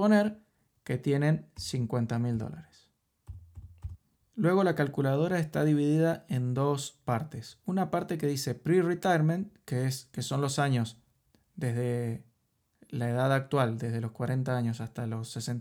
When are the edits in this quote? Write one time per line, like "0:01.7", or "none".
none